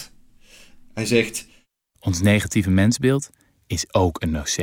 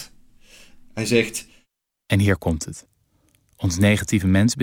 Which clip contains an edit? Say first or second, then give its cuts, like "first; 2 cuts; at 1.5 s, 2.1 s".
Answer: first; 1 cut; at 1.9 s